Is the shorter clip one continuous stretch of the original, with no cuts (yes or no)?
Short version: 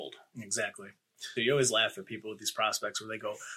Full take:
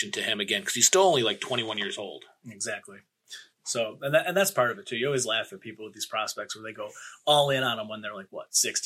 no